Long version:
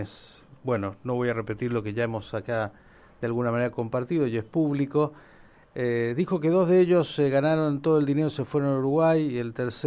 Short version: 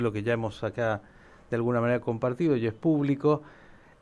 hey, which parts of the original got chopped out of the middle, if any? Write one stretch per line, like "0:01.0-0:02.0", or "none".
none